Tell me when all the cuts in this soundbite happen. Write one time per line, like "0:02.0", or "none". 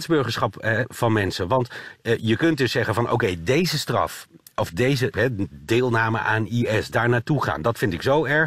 0:05.1